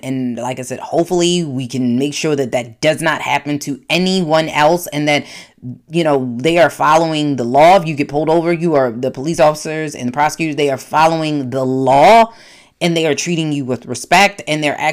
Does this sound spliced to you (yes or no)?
no